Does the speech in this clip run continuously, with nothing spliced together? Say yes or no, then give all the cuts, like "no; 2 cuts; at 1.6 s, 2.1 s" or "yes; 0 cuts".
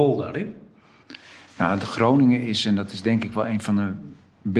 yes; 0 cuts